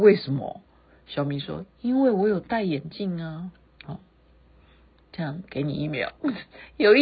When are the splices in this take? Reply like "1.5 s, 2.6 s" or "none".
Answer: none